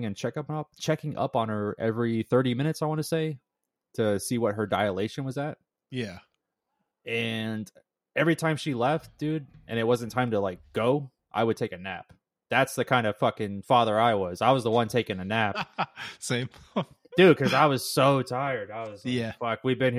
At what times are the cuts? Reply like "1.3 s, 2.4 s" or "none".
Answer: none